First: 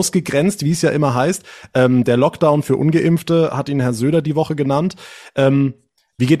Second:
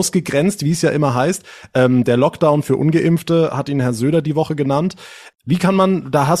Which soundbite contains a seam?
second; 1 cut; at 5.3 s

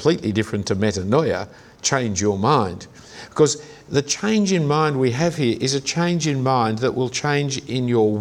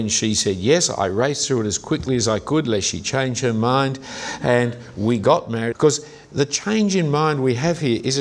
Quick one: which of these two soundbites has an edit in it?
second; 1 cut; at 5.7 s

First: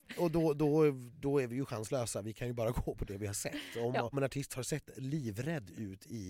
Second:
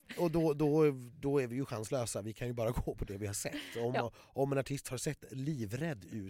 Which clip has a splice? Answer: first; 1 cut; at 4.1 s

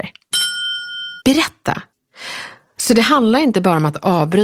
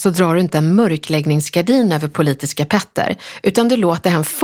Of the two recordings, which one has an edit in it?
first; 2 cuts; at 1.2 s, 2.8 s

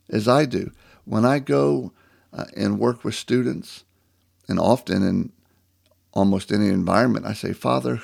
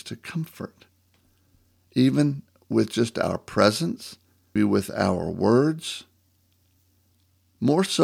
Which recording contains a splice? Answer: second; 1 cut; at 4.6 s

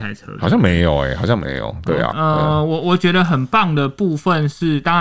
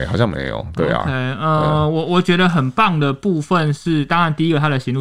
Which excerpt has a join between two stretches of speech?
first; 1 cut; at 2.1 s

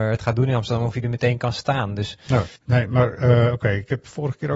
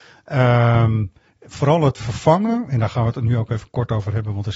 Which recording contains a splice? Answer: first; 1 cut; at 2.6 s

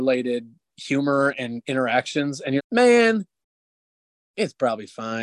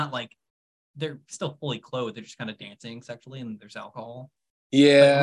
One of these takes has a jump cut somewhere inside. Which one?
first; 1 cut; at 2.6 s

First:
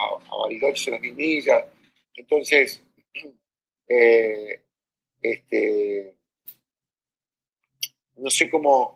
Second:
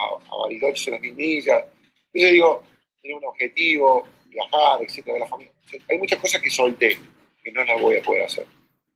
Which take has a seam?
first; 1 cut; at 2.0 s

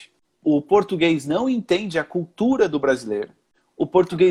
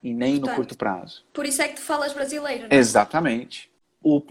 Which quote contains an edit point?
second; 1 cut; at 1.3 s

